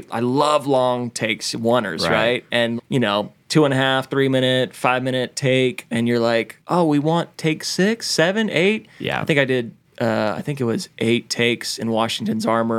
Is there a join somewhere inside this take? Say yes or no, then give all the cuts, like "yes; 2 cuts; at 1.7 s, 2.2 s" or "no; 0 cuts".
yes; 1 cut; at 2.8 s